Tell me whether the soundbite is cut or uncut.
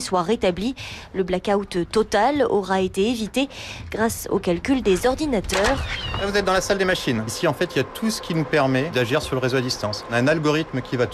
uncut